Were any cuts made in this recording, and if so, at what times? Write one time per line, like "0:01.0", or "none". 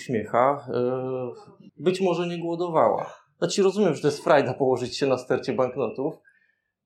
0:01.7